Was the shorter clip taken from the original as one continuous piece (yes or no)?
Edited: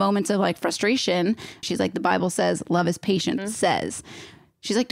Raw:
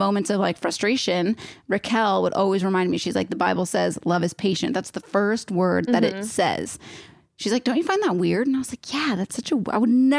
no